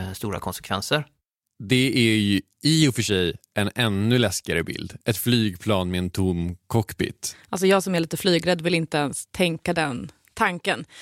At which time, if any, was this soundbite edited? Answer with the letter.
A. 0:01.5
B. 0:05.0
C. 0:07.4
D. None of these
D